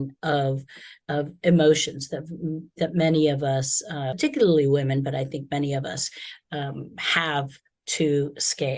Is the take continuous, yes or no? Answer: yes